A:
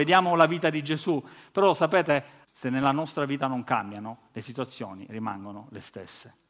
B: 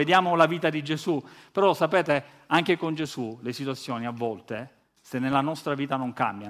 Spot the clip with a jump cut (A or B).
A